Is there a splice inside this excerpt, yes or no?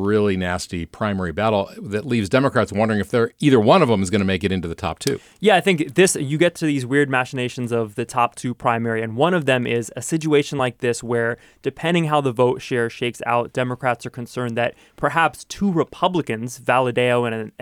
no